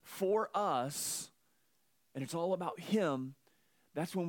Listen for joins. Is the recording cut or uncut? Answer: uncut